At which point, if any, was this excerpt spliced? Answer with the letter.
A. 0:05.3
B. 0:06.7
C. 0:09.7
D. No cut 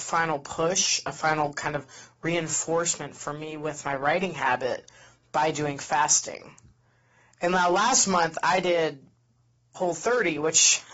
C